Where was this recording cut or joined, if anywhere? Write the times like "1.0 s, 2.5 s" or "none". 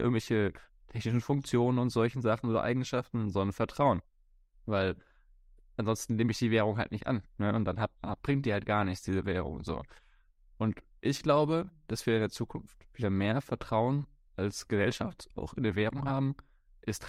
none